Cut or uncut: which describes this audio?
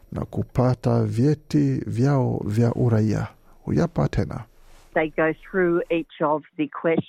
uncut